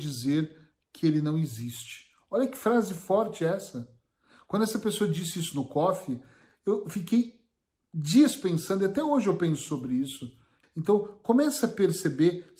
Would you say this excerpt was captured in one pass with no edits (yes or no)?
no